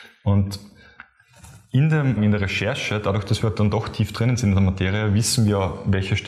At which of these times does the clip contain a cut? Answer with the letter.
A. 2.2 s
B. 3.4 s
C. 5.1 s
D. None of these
A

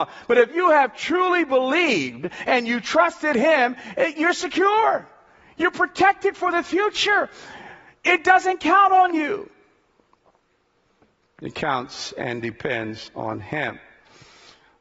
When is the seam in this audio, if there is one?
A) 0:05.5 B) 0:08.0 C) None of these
C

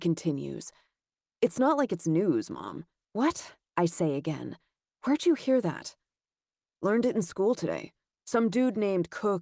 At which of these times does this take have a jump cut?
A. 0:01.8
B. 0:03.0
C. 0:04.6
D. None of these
B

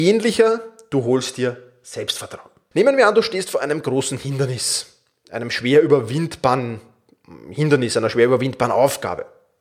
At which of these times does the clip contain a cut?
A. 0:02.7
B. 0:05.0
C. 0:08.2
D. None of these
A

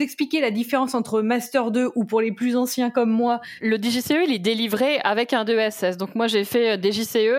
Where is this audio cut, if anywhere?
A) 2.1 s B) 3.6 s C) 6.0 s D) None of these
B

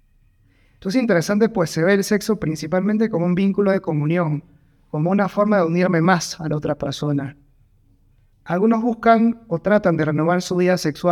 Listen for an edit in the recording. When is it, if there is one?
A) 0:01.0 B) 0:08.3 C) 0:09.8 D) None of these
B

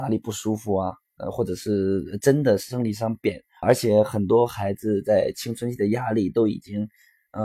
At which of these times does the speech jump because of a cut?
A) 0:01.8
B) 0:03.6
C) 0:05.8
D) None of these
B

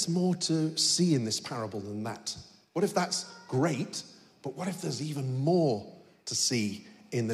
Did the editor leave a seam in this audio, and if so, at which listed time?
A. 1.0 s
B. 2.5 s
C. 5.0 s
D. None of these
D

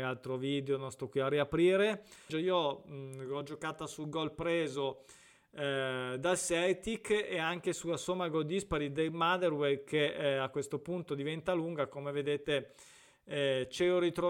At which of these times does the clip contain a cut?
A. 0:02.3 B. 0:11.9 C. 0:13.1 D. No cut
A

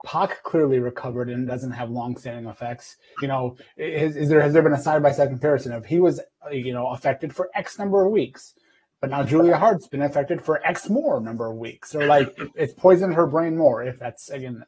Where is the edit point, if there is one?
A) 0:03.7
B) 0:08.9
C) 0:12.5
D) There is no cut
C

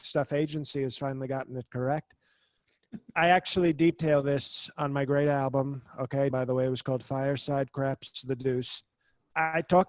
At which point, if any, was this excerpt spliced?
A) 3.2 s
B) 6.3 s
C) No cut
B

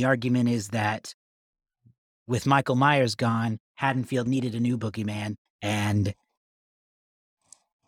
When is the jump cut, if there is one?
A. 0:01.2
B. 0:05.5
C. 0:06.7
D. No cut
B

